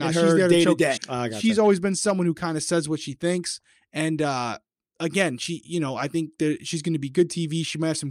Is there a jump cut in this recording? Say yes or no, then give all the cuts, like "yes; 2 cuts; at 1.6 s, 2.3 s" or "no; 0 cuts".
yes; 1 cut; at 1.0 s